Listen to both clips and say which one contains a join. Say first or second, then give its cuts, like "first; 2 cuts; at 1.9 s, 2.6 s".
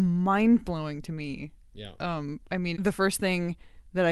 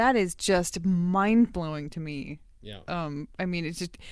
first; 1 cut; at 2.7 s